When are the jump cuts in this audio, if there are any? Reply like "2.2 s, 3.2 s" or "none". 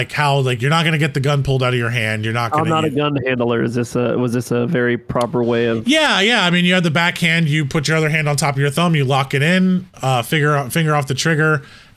none